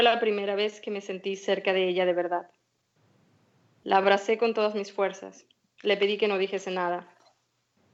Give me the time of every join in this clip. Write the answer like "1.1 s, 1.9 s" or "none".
none